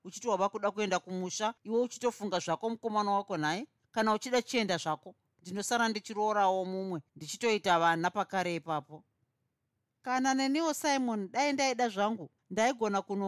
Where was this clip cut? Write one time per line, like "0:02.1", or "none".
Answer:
0:12.4